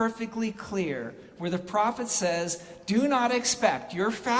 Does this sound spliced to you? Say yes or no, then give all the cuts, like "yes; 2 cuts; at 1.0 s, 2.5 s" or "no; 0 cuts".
no; 0 cuts